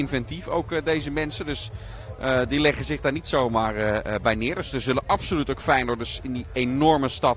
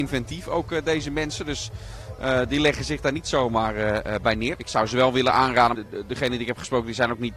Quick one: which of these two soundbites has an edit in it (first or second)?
second